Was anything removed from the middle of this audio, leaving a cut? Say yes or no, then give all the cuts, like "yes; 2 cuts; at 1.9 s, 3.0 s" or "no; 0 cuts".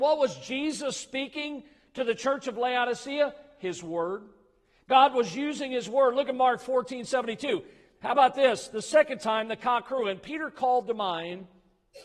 no; 0 cuts